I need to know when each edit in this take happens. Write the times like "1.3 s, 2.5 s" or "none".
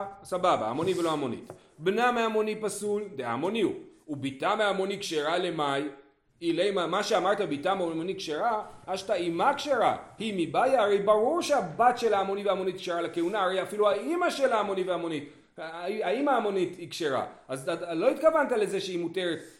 8.8 s